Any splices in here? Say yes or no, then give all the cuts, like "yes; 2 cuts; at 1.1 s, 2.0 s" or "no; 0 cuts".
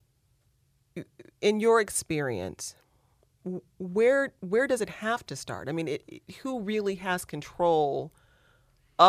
no; 0 cuts